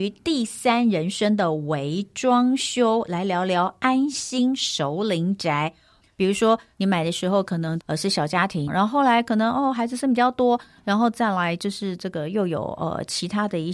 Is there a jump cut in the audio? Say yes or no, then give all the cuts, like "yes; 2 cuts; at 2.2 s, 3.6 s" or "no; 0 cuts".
yes; 2 cuts; at 6.0 s, 8.7 s